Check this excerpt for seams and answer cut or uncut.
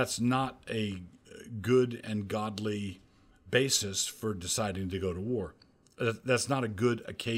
uncut